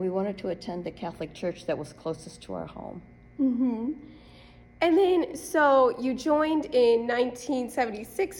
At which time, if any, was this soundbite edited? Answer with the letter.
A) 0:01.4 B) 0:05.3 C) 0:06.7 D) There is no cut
D